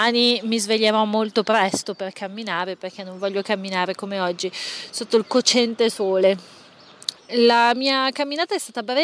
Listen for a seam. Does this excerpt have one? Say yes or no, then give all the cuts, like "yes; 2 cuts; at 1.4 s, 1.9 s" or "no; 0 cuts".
yes; 1 cut; at 7.2 s